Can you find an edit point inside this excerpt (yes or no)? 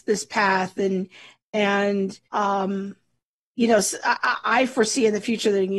yes